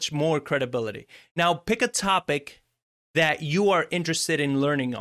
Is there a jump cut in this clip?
no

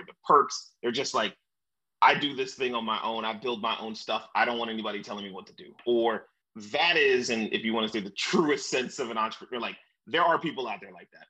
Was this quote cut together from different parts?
no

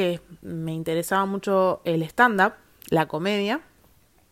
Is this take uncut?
yes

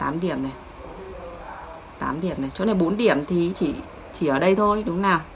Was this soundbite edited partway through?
no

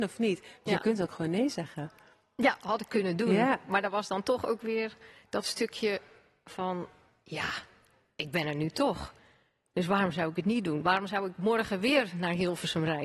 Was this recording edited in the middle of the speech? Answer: no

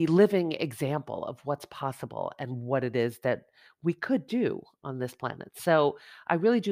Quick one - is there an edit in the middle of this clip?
no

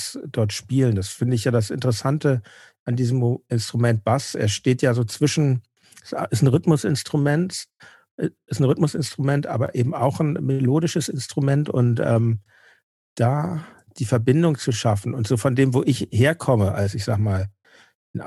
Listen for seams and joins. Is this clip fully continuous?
yes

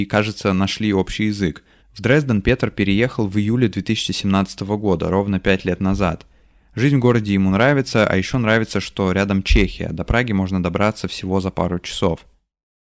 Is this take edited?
yes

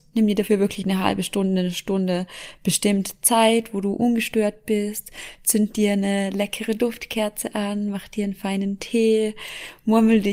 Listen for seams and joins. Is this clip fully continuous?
yes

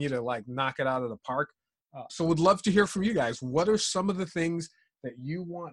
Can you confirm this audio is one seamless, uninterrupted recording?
no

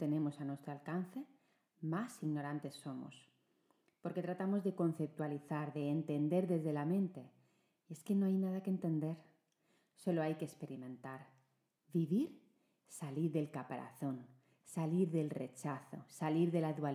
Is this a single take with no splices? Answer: yes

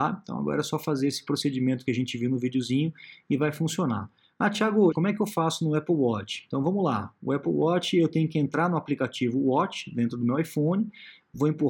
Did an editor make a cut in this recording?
yes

